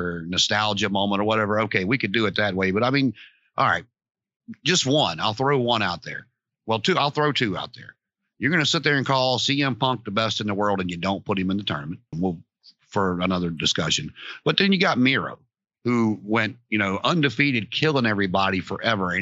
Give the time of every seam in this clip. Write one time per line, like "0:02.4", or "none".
0:12.1